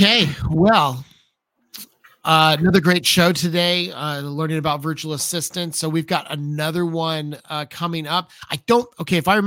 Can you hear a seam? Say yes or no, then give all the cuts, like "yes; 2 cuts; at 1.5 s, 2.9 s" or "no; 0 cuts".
no; 0 cuts